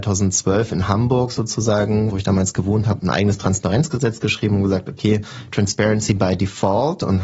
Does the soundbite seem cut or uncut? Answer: uncut